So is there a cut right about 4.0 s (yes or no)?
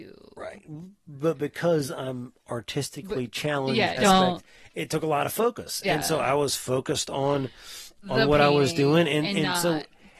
yes